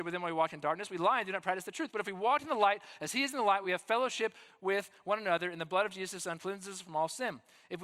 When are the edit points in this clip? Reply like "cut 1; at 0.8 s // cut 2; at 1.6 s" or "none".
none